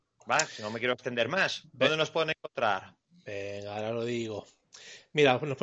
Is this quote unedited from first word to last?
yes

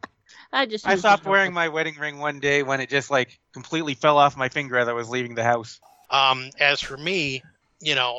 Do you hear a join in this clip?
yes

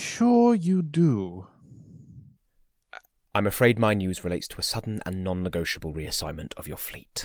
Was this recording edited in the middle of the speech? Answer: yes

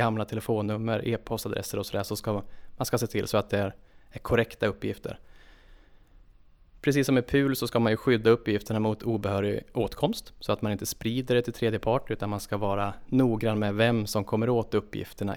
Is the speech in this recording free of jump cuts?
yes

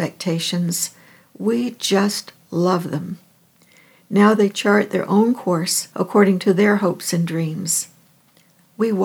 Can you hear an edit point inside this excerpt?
no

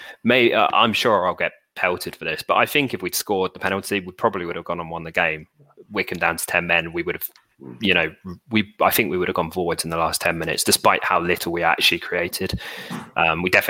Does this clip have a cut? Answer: no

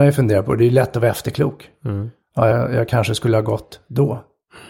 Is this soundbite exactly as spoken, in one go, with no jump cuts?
yes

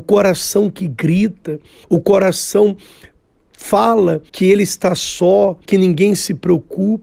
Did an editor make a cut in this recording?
yes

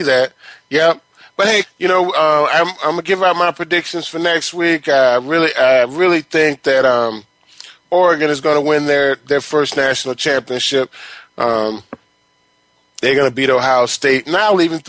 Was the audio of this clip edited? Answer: yes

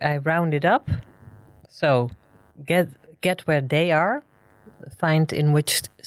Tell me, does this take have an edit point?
no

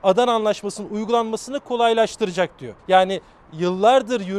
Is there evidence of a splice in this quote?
yes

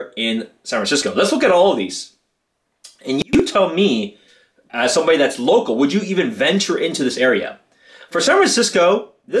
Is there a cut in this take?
no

